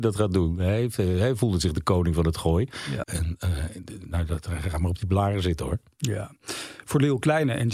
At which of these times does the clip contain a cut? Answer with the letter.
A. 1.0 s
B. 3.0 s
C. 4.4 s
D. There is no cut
B